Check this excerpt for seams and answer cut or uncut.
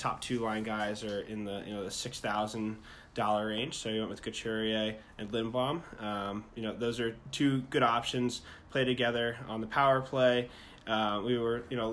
uncut